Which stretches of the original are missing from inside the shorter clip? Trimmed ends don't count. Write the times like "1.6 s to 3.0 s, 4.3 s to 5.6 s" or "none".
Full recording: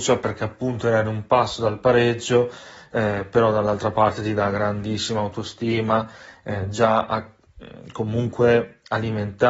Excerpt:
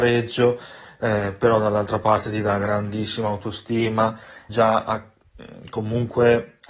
6.4 s to 6.7 s